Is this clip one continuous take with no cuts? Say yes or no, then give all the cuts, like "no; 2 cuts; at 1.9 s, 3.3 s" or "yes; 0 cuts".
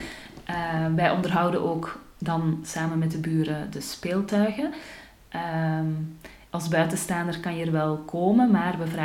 no; 1 cut; at 6.5 s